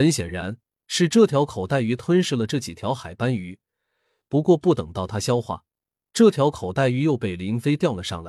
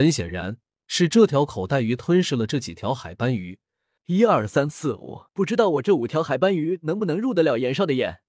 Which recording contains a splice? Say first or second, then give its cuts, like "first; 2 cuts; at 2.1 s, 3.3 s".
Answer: second; 2 cuts; at 4.0 s, 5.3 s